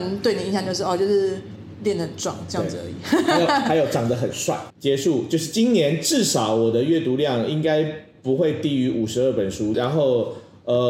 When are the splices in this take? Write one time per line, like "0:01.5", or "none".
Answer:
0:04.7
0:09.7

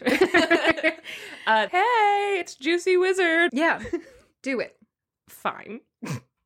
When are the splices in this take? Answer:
0:01.7
0:03.5

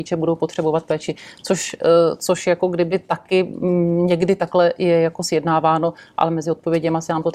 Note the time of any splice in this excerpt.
none

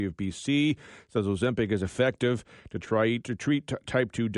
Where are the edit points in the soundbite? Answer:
0:03.2

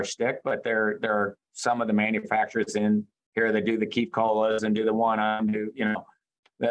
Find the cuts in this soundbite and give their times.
none

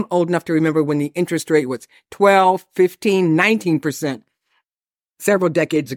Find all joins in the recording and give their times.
none

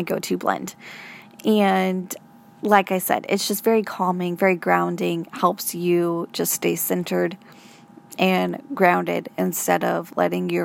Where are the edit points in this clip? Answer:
none

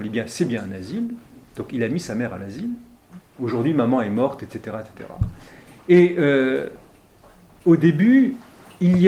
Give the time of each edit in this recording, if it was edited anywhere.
0:03.2

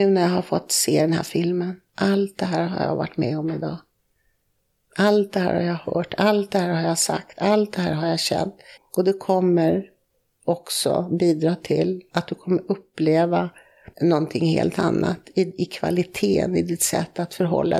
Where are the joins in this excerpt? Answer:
0:08.8
0:13.9

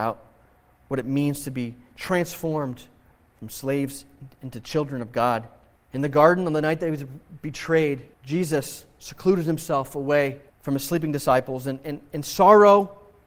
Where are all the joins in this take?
0:05.8
0:08.1
0:10.5

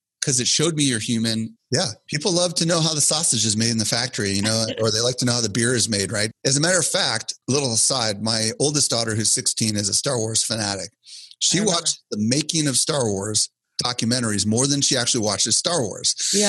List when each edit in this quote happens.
0:01.6

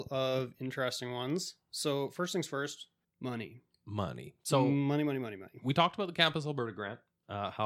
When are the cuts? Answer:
none

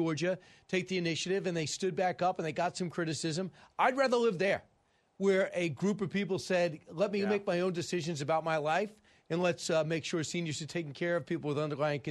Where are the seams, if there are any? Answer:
none

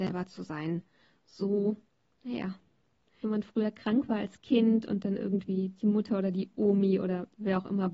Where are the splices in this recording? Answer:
0:03.2

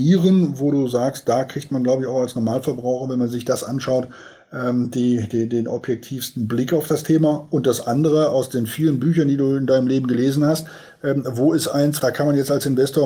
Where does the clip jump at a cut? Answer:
0:12.0

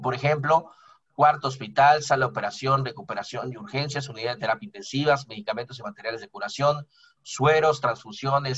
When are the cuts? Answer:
none

